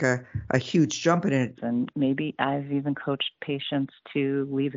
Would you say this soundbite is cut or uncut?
cut